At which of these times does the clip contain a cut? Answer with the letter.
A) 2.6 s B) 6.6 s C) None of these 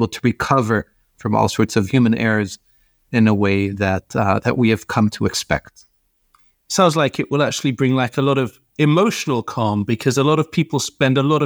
C